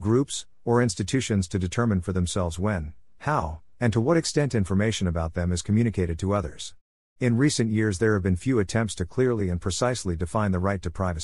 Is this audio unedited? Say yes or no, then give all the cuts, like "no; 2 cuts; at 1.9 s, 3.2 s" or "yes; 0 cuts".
no; 1 cut; at 7.2 s